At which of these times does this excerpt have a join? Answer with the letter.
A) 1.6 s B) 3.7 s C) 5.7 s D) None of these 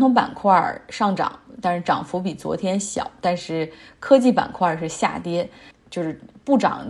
C